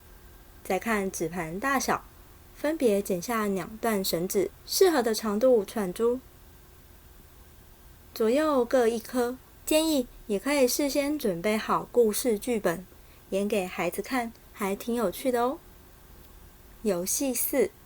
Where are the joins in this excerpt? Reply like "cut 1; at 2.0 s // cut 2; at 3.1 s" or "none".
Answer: cut 1; at 5.7 s // cut 2; at 9.6 s